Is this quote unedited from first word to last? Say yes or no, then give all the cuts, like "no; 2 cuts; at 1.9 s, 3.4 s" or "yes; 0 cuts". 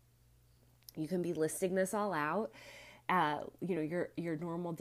yes; 0 cuts